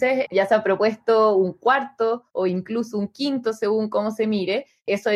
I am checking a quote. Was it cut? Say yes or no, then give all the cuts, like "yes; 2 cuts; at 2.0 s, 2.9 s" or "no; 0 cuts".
no; 0 cuts